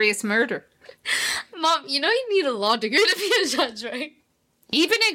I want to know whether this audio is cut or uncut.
uncut